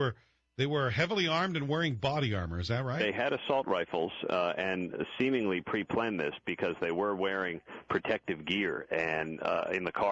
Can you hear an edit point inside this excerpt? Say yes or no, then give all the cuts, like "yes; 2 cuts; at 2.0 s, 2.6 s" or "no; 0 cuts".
no; 0 cuts